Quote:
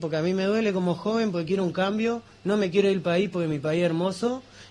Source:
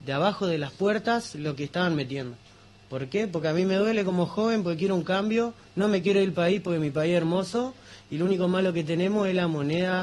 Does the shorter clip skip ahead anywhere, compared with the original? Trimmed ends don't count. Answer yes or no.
no